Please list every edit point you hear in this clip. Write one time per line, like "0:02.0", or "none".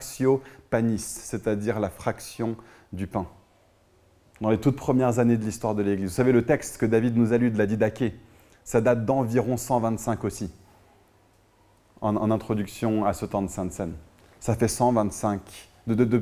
none